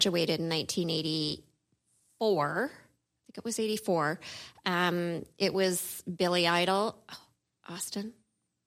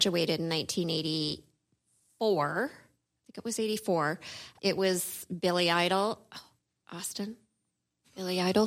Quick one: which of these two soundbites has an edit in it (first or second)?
second